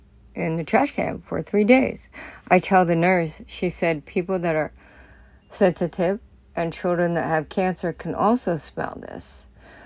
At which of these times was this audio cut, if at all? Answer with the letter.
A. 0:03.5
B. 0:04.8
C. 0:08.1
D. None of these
D